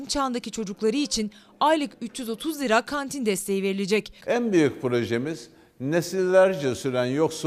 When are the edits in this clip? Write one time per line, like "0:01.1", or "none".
0:04.2